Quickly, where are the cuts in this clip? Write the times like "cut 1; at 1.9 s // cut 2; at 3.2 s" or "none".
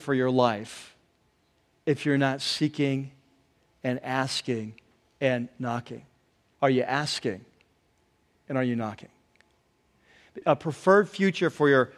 cut 1; at 6.5 s // cut 2; at 10.4 s